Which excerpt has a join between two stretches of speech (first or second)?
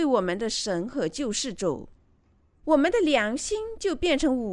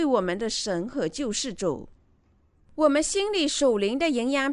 first